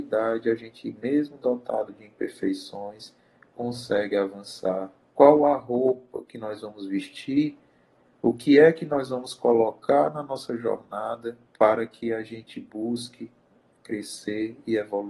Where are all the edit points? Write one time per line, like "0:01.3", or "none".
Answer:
0:05.1
0:08.1
0:11.5